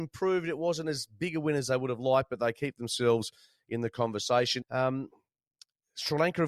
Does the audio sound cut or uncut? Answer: cut